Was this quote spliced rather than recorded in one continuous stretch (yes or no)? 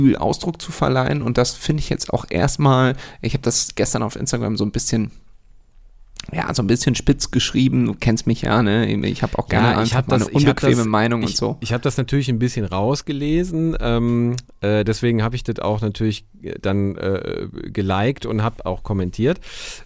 no